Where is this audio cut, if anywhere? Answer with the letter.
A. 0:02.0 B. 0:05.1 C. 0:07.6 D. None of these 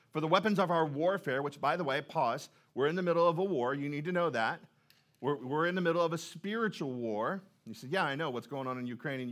D